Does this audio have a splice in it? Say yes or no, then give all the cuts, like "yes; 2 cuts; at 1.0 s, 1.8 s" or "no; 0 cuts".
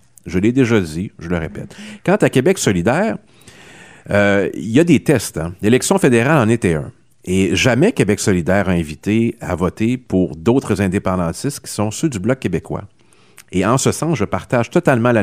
no; 0 cuts